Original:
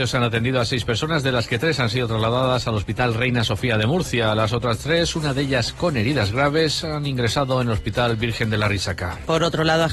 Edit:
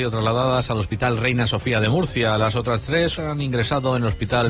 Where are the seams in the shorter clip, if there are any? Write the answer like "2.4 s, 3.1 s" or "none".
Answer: 3.2 s